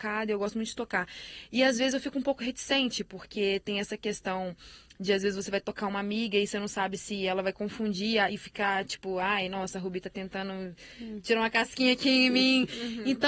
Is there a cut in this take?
yes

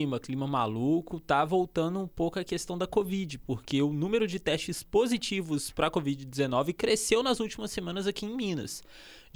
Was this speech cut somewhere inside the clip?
no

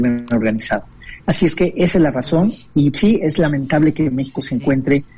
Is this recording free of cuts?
no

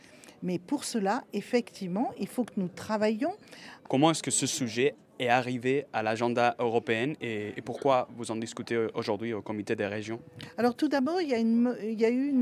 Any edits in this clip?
yes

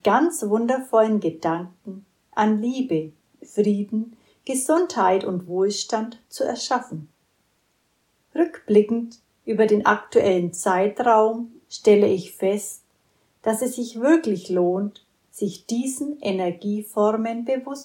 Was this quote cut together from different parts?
no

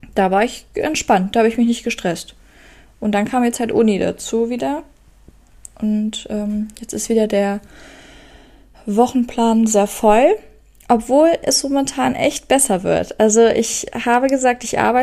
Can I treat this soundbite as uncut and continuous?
yes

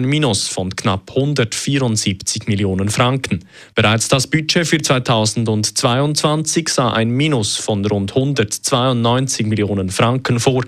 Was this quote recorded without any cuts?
yes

